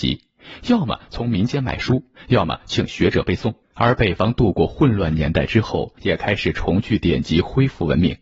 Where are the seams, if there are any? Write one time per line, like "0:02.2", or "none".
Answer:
0:03.6
0:06.0